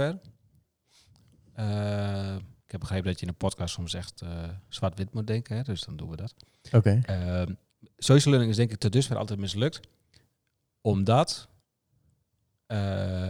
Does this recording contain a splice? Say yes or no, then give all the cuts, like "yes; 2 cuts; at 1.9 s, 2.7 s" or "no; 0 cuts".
no; 0 cuts